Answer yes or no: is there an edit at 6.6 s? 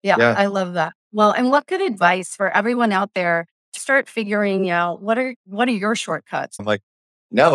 yes